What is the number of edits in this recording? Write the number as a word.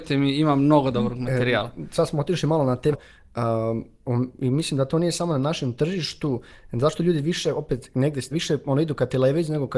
two